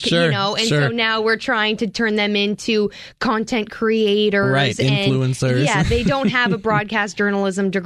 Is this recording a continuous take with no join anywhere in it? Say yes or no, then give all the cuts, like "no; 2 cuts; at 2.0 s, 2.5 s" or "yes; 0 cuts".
yes; 0 cuts